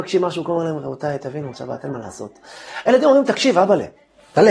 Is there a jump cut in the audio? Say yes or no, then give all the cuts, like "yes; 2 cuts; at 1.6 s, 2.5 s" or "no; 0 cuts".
yes; 1 cut; at 1.5 s